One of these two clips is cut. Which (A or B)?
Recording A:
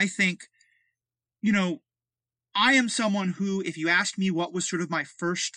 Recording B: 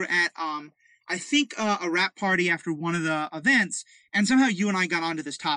B